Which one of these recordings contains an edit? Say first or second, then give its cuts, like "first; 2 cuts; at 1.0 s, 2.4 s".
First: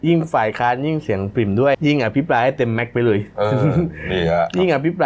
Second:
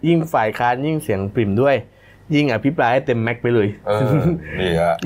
first; 1 cut; at 1.7 s